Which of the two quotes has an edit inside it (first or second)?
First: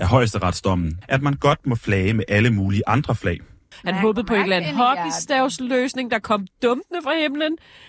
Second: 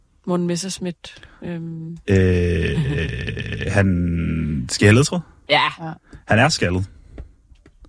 first